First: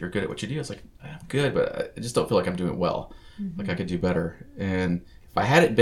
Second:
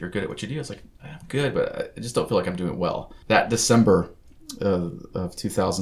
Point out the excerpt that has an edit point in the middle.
second; 1 cut; at 3.2 s

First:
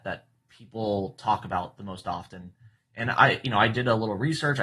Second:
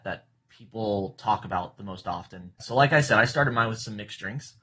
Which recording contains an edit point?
second; 1 cut; at 2.6 s

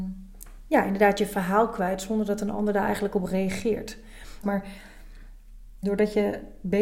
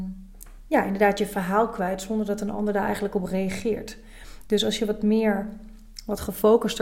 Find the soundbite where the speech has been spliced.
first; 2 cuts; at 4.4 s, 5.8 s

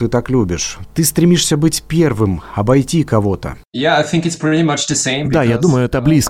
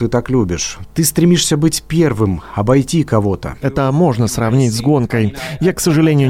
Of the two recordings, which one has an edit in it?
second; 1 cut; at 3.6 s

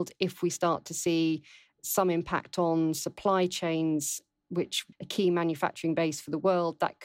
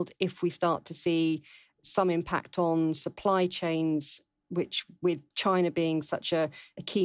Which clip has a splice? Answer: first; 1 cut; at 4.9 s

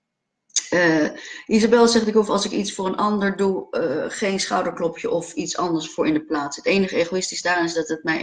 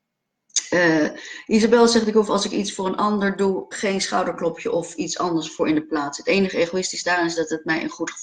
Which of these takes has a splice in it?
second; 1 cut; at 3.7 s

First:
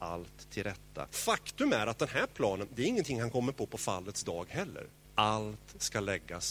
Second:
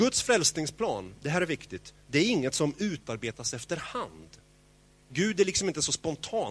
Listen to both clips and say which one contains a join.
first; 2 cuts; at 1.1 s, 5.0 s

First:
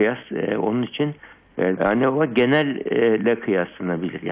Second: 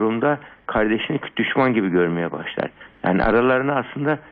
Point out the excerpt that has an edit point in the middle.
first; 1 cut; at 1.8 s

